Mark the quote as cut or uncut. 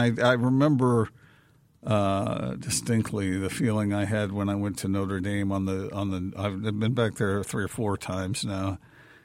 uncut